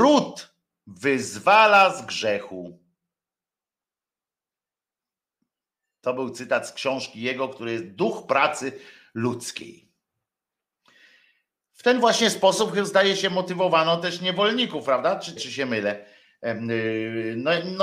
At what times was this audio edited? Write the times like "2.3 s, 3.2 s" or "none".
15.4 s